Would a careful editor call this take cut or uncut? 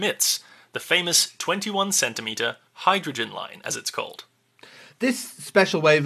uncut